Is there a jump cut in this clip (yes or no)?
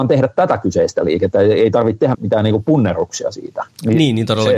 yes